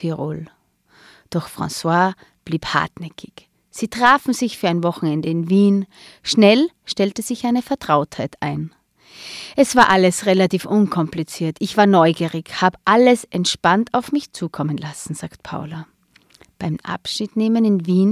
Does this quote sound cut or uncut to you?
uncut